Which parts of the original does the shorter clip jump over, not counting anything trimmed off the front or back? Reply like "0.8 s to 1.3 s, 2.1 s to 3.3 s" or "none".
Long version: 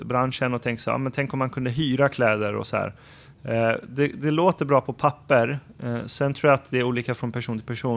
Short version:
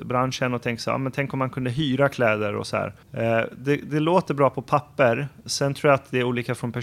3.0 s to 3.3 s, 5.8 s to 6.1 s